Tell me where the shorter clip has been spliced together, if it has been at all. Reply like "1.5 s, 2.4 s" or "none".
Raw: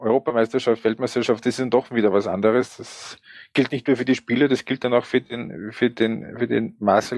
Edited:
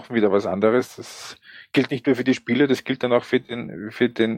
none